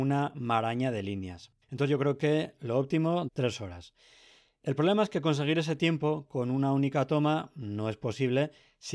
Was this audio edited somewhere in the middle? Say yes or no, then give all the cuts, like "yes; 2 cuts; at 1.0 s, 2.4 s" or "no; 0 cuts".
yes; 2 cuts; at 1.6 s, 3.3 s